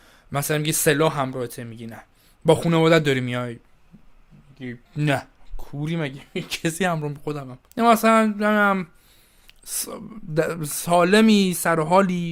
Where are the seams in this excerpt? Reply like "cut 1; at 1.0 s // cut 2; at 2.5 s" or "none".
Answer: cut 1; at 4.9 s // cut 2; at 7.7 s